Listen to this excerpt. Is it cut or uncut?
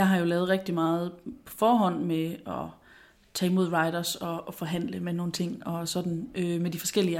uncut